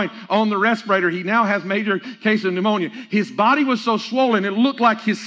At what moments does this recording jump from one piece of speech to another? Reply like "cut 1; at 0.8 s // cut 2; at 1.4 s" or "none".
none